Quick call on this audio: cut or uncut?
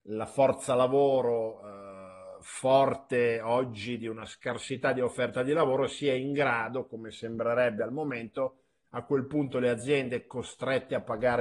cut